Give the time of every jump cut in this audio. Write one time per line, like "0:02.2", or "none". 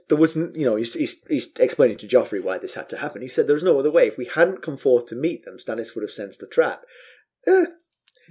none